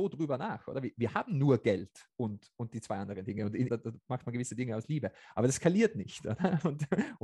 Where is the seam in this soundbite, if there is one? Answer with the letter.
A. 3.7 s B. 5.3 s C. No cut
A